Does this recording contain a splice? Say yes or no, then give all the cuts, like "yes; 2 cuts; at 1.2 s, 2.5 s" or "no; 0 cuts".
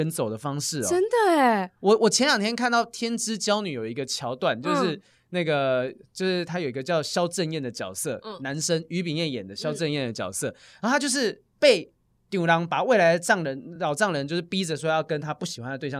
no; 0 cuts